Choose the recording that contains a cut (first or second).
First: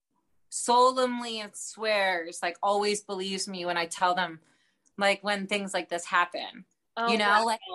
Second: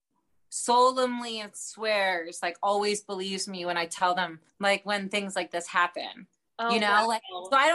second